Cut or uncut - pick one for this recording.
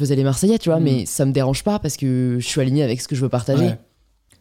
uncut